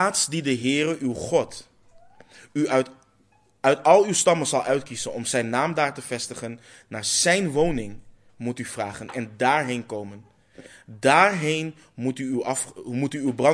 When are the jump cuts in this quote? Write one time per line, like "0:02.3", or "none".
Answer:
none